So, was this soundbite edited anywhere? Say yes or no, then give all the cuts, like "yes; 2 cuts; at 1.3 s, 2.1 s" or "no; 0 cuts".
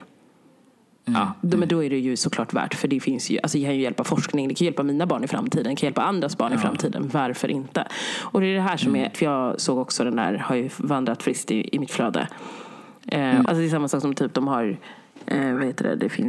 yes; 2 cuts; at 9.1 s, 13.4 s